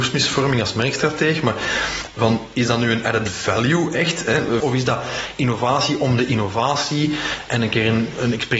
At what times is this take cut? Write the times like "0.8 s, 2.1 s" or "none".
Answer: 4.6 s